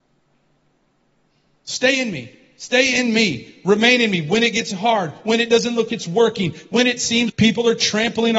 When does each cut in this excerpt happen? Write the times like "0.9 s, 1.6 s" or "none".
5.9 s, 7.3 s